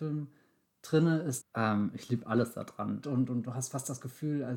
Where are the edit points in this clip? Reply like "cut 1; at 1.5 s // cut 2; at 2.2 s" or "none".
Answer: cut 1; at 1.4 s // cut 2; at 3.0 s